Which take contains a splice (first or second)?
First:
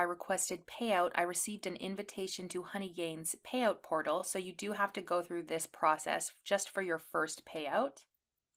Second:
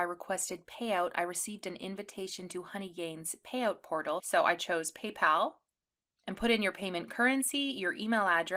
second